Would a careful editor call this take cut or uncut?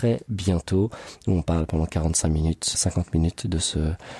cut